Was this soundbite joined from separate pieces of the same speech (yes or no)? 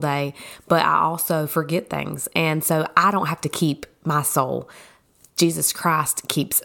no